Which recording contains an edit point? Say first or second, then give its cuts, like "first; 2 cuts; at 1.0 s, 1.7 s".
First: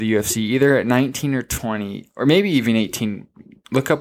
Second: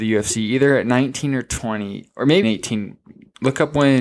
second; 1 cut; at 2.4 s